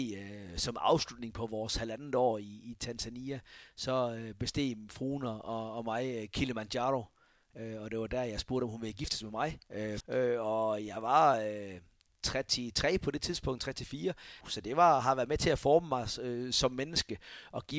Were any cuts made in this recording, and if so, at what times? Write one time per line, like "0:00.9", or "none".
0:10.0
0:14.4